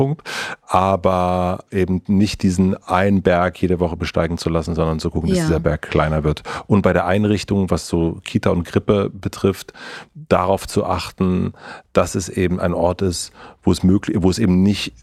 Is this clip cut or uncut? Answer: uncut